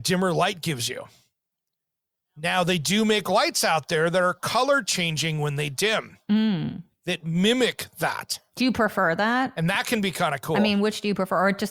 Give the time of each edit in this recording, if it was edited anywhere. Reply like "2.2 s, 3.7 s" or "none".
none